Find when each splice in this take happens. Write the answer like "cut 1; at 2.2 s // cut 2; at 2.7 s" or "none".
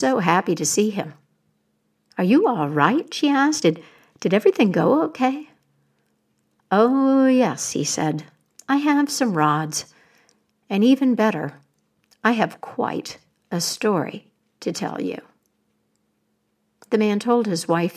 none